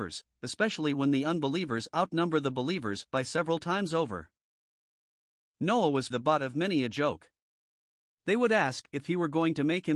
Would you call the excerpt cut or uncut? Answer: cut